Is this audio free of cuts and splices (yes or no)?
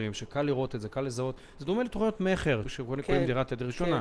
no